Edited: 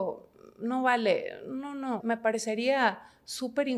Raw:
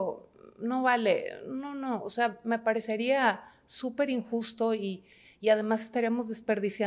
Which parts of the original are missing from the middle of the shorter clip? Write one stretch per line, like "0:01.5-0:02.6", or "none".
0:02.0-0:02.4